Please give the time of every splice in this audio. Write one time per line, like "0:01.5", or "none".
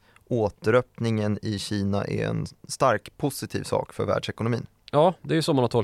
none